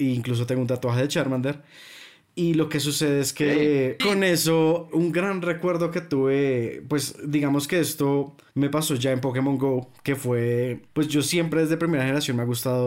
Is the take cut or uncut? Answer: cut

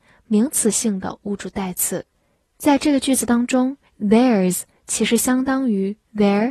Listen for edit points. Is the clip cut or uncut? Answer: uncut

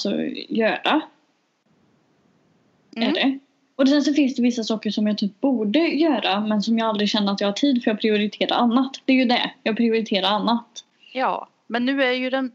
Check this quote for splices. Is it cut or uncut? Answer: uncut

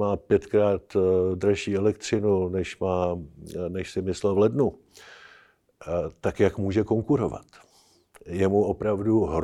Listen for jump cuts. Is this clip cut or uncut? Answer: uncut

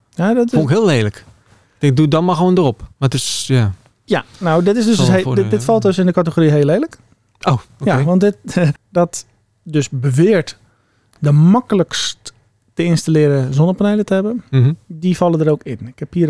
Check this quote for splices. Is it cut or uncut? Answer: cut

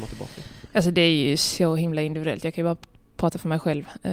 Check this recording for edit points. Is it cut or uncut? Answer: uncut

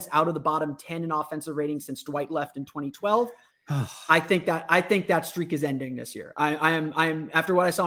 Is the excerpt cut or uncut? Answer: uncut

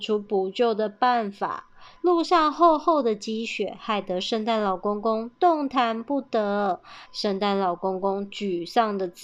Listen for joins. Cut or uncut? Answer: cut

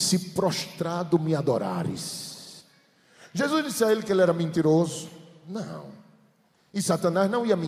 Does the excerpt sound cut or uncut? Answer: uncut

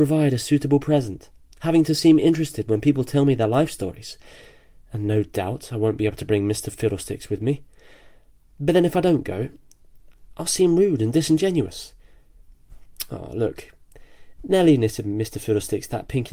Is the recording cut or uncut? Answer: uncut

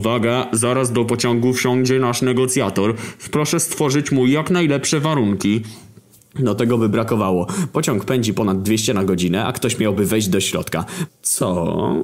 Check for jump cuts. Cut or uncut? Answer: cut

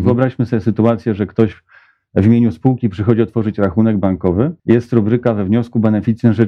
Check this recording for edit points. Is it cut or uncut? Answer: cut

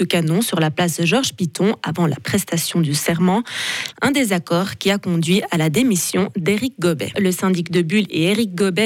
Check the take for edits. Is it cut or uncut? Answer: cut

